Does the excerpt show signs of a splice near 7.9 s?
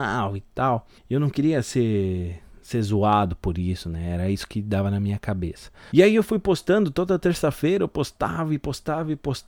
no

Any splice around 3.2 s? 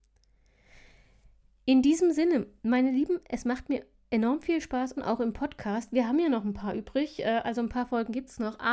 no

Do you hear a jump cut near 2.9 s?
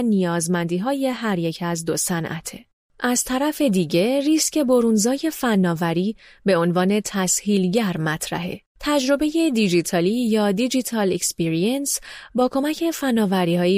no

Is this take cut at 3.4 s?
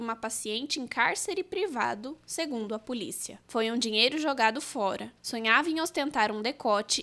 yes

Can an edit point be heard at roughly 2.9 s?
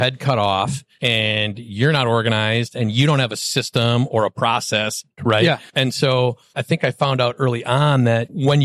no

